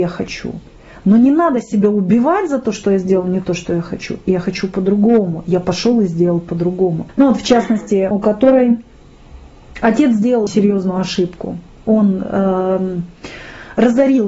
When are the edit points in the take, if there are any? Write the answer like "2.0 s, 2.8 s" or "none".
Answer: 7.1 s, 8.1 s, 10.5 s